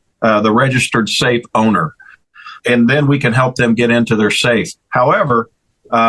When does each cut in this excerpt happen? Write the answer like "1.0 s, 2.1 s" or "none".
2.6 s

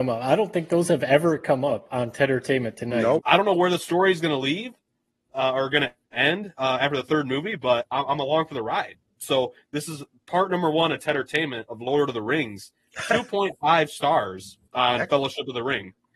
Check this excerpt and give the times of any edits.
3.2 s

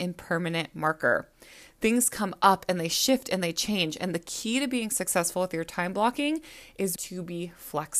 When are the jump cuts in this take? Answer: 7.0 s

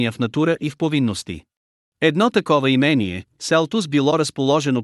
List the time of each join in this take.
1.9 s

